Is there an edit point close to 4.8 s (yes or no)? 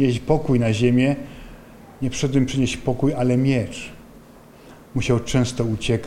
yes